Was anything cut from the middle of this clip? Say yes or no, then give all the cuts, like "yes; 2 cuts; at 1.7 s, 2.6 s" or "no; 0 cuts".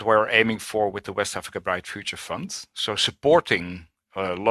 no; 0 cuts